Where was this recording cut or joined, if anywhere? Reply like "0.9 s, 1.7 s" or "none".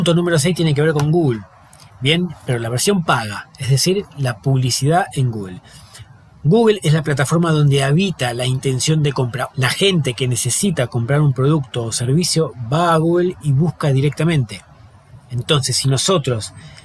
9.5 s